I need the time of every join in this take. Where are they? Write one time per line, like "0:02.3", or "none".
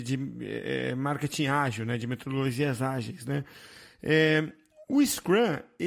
none